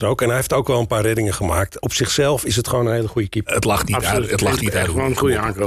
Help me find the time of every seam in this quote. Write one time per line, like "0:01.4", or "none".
none